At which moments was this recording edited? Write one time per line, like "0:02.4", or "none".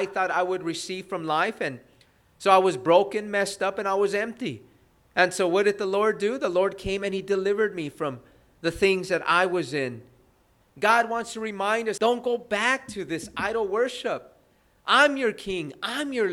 0:10.6
0:12.0